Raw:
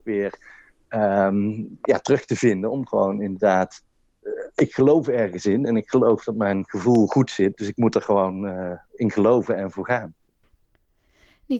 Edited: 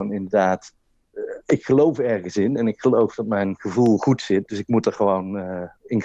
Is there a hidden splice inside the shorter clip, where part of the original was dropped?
no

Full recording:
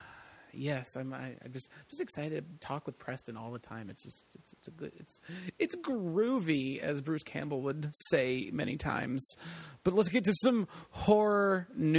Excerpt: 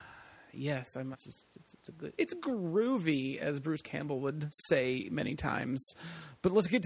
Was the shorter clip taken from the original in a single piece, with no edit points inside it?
no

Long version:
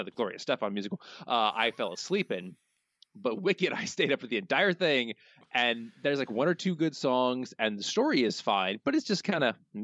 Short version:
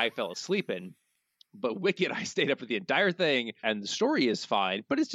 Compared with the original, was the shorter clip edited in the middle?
yes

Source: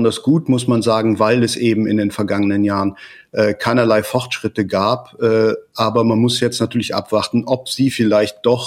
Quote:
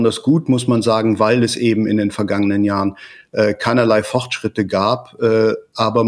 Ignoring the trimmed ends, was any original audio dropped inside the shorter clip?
no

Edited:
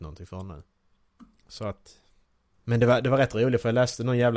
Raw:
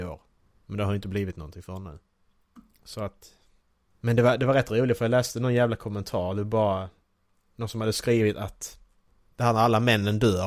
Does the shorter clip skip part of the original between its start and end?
no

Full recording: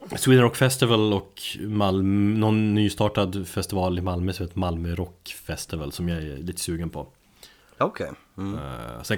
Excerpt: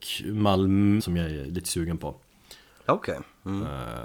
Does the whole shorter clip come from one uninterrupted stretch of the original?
no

